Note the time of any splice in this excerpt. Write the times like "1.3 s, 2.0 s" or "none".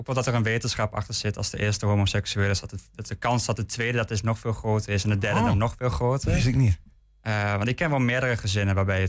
none